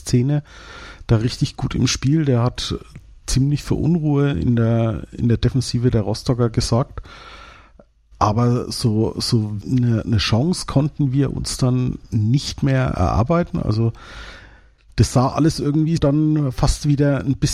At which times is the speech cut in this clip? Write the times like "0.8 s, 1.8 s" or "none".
9.6 s, 16.0 s